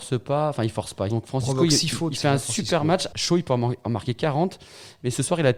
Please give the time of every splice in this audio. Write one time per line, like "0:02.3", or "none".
0:01.1
0:03.1